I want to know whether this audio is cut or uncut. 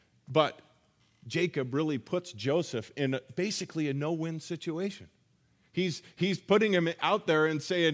uncut